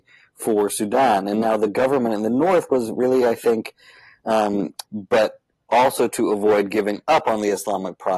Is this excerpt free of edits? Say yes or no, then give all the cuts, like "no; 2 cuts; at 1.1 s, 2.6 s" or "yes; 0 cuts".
no; 1 cut; at 4.8 s